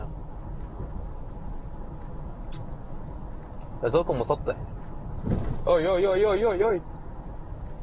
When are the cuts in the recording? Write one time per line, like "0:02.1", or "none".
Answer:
none